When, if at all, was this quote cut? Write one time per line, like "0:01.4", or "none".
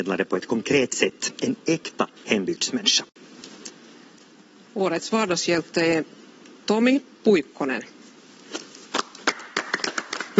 none